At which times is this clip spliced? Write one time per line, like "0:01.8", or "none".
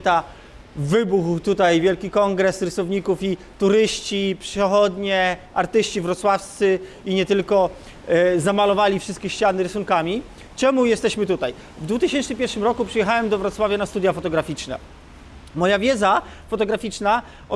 none